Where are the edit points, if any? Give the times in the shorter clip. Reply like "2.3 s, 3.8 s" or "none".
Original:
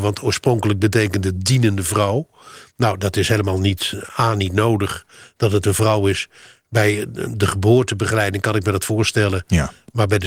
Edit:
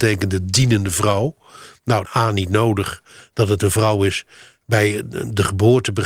2.0 s